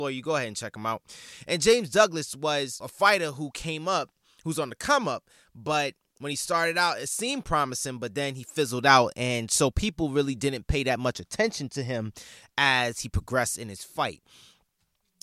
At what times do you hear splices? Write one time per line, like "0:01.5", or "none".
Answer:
none